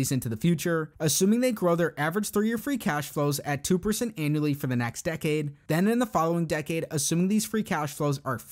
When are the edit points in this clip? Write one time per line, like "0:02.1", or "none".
0:00.9